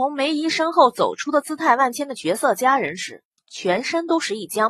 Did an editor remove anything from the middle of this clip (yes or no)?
no